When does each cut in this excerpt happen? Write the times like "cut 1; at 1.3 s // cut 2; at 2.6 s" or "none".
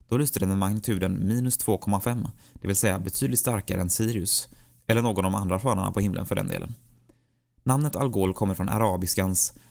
none